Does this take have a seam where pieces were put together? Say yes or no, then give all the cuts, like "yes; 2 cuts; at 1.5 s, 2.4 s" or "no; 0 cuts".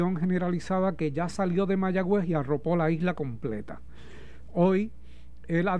no; 0 cuts